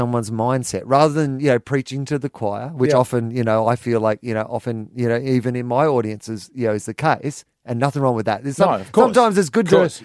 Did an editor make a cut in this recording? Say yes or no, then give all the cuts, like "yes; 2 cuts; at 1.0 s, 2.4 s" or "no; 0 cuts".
no; 0 cuts